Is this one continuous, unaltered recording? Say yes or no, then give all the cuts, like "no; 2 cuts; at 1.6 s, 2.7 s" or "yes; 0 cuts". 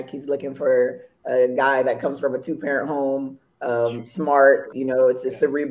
no; 1 cut; at 4.7 s